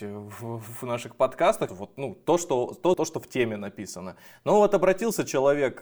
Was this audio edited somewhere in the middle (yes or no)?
yes